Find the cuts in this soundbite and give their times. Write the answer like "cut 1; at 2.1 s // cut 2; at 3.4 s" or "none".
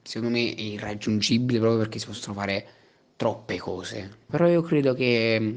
cut 1; at 4.3 s